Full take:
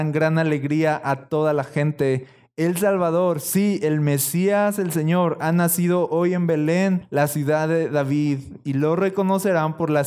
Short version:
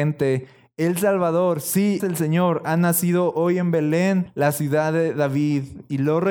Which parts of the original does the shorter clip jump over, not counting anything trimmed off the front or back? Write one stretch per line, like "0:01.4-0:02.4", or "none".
0:03.8-0:04.8

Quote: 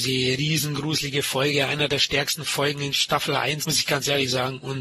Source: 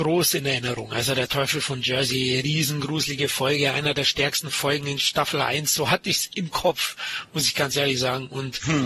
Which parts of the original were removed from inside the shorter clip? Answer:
0:05.7-0:07.3

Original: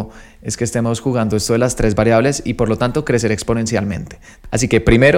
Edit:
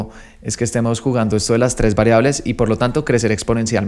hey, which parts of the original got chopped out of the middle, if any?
none

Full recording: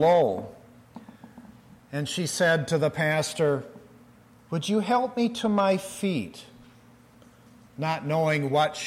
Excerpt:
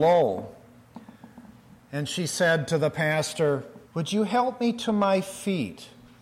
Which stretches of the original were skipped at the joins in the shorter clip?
0:03.9-0:04.4

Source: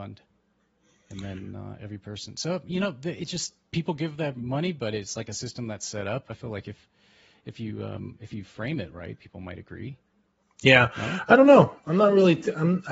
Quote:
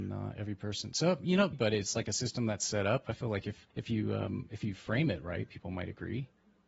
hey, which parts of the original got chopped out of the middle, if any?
0:03.0-0:04.7
0:06.9-0:07.4

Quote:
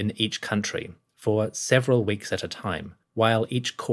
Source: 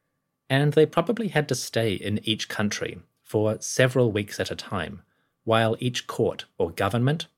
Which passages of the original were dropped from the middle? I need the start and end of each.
0:05.1-0:05.3

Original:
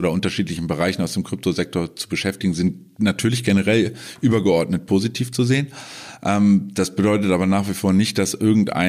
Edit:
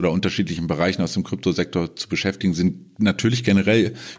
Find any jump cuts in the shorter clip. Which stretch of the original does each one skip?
none

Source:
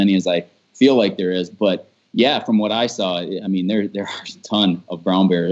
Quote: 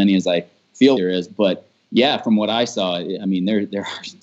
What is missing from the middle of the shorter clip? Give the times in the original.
0:00.9-0:01.2

